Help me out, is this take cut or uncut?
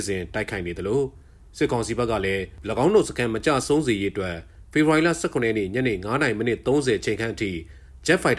uncut